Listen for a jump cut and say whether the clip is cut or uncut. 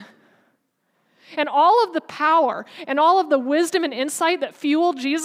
uncut